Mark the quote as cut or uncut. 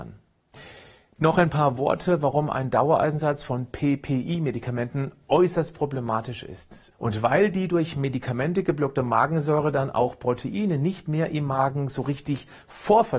cut